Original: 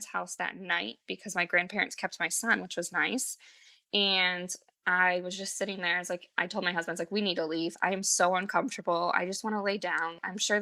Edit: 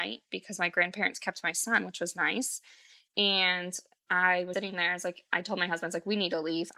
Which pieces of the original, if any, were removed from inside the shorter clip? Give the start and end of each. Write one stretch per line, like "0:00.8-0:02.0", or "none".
0:05.3-0:05.6